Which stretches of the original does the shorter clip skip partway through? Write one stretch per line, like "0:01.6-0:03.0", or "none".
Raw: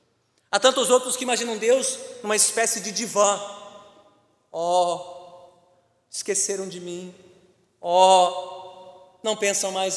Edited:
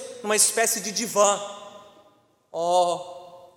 none